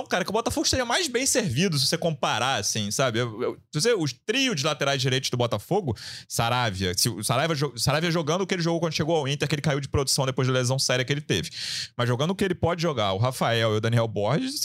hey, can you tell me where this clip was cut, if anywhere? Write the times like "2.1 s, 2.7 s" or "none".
none

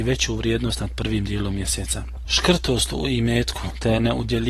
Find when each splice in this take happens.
2.2 s

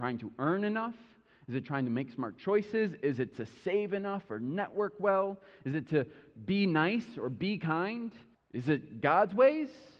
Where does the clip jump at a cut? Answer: 8.3 s

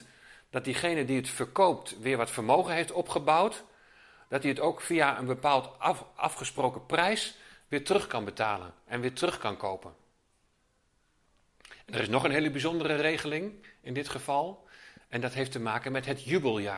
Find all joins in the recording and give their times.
none

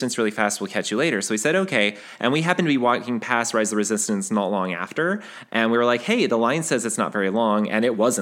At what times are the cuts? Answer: none

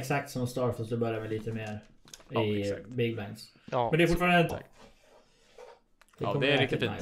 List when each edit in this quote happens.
4.5 s

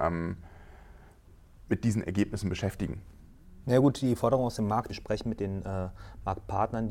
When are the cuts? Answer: 3.6 s, 4.9 s

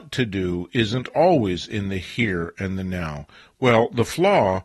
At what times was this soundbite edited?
3.4 s

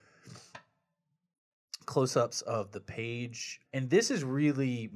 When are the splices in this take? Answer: 3.6 s

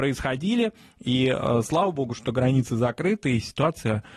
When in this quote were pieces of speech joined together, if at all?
none

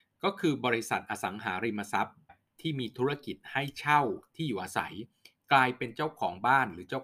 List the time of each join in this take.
2.3 s

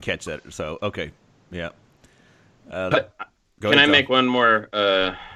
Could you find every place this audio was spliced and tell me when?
2.9 s

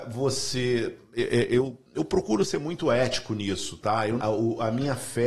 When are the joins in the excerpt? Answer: 1.9 s, 4.2 s

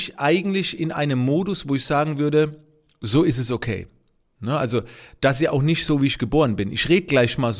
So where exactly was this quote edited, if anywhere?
none

